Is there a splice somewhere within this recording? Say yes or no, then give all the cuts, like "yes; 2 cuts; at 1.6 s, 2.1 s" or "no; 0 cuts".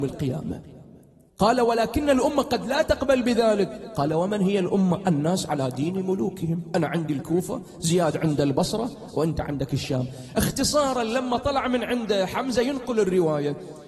yes; 1 cut; at 1.3 s